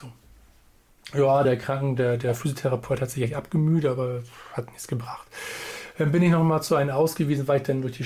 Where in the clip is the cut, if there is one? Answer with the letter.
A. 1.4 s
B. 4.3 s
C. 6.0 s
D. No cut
D